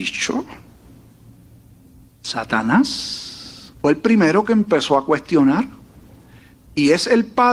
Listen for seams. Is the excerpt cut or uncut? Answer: cut